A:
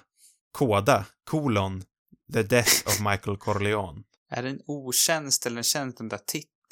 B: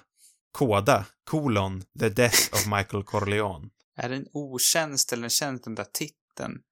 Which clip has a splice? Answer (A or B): B